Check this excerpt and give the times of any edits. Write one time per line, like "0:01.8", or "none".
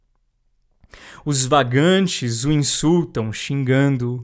none